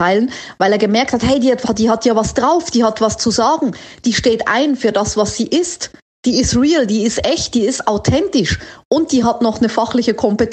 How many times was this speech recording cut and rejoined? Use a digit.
0